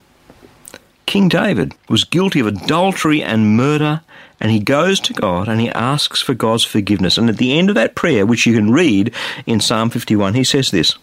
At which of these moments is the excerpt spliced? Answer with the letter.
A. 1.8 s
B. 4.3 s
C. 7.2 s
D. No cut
A